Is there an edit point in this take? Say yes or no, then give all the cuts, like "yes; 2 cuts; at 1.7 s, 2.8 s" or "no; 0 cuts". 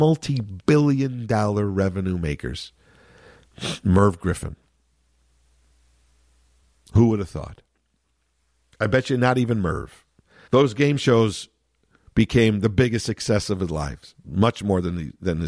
yes; 1 cut; at 10.5 s